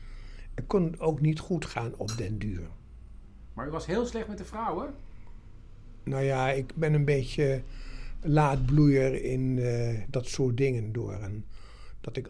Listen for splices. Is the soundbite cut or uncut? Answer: uncut